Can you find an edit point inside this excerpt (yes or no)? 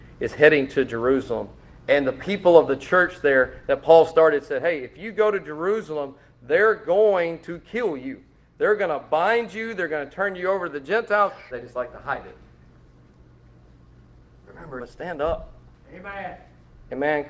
yes